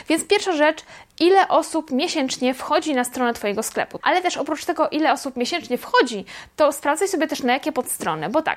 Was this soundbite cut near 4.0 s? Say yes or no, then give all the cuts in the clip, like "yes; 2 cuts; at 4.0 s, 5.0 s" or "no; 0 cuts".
yes; 1 cut; at 4.0 s